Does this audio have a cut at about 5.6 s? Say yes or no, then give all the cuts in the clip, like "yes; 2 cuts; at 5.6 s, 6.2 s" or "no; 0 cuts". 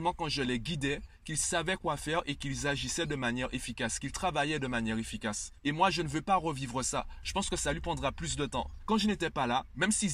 no; 2 cuts; at 7.2 s, 8.8 s